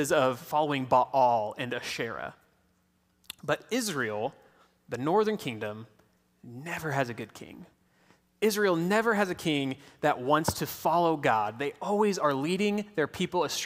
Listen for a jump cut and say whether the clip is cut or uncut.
cut